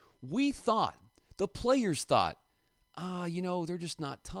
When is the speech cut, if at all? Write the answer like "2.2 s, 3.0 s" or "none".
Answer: none